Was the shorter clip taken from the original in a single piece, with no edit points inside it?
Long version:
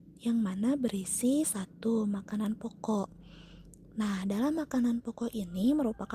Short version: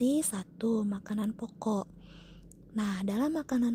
yes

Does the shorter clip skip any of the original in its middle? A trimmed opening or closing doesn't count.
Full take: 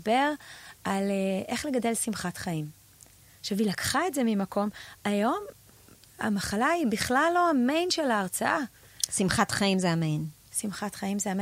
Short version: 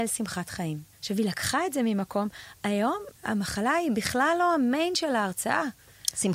yes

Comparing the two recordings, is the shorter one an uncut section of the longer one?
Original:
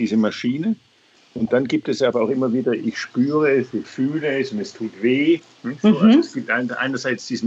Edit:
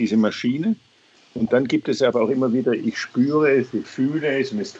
yes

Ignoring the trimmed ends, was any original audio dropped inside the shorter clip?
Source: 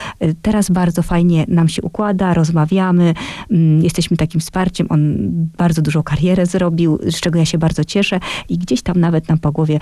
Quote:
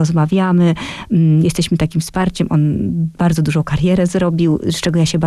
no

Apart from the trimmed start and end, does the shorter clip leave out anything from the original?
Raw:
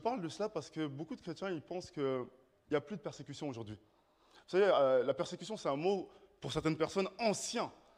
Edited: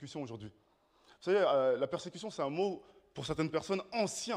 no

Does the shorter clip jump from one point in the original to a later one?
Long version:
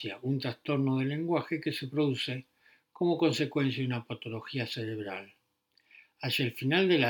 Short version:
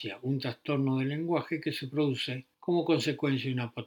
yes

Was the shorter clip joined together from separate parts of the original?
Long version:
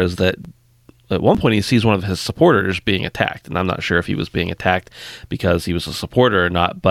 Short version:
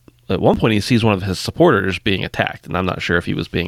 no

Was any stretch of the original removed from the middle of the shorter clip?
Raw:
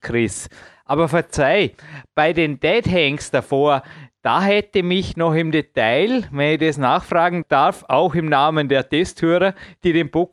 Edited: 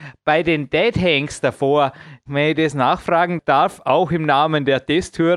yes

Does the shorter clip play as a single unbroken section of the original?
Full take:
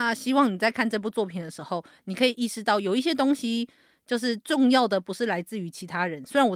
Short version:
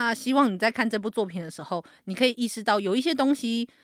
yes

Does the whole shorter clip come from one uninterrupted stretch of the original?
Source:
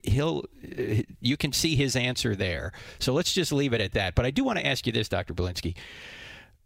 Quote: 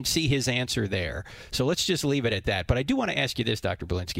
yes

